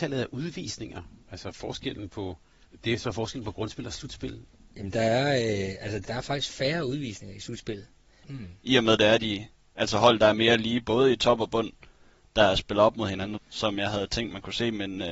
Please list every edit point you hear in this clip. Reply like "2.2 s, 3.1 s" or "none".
6.0 s, 8.2 s, 13.4 s